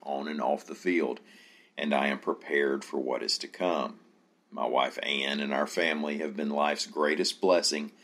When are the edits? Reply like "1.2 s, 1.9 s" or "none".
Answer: none